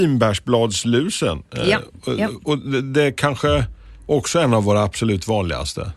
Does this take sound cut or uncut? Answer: uncut